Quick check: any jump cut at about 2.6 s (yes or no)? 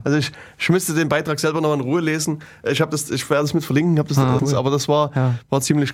no